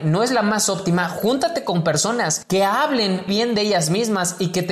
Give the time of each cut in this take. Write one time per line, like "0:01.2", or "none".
0:03.3